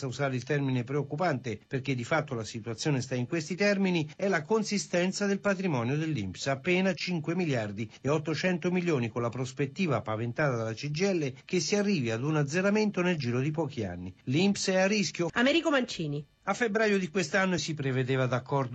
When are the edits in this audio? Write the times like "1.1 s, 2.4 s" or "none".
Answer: 15.3 s, 17.6 s